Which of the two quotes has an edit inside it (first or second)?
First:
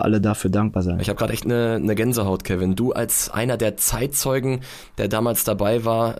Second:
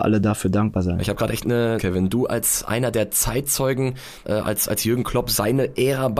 second